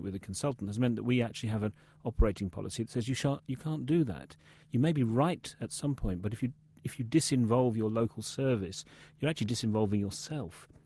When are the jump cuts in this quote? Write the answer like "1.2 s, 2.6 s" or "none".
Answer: none